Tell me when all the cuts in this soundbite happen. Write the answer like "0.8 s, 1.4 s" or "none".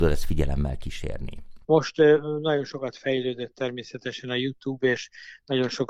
1.6 s